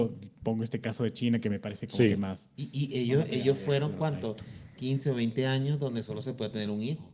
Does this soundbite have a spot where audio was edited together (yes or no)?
no